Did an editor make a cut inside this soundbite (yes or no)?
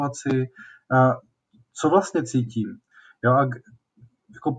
no